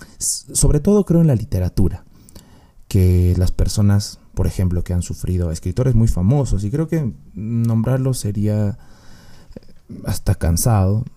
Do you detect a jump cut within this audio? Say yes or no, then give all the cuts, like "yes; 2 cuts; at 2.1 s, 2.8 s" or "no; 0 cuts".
no; 0 cuts